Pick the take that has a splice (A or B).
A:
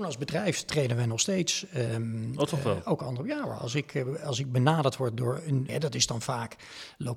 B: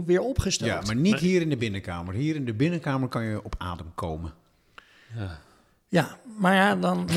A